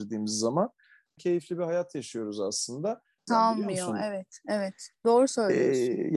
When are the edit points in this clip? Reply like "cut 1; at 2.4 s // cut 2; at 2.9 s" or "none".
cut 1; at 1.2 s // cut 2; at 3.3 s

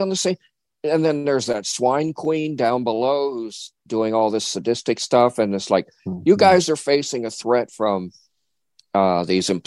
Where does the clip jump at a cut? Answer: none

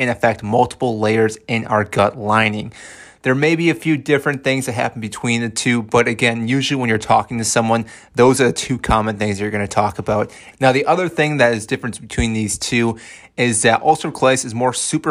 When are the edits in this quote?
cut 1; at 3.2 s // cut 2; at 10.5 s

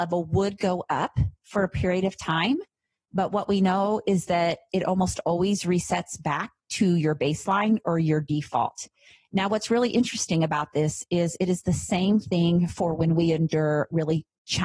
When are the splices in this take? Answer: none

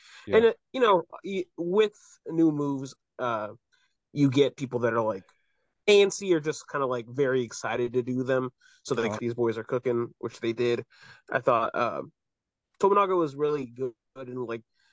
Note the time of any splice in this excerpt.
cut 1; at 9.2 s

